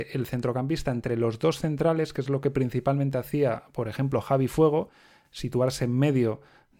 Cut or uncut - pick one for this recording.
uncut